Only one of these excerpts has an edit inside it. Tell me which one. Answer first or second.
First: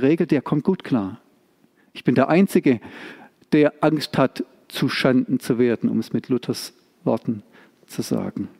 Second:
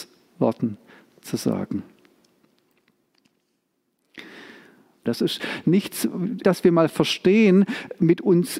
second